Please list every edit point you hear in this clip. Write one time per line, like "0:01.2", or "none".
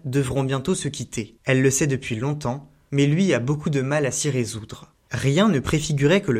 0:05.0